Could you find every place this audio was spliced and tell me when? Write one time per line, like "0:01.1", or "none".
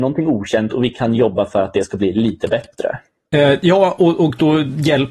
none